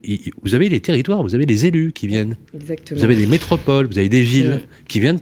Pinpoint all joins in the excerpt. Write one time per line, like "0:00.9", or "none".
0:02.5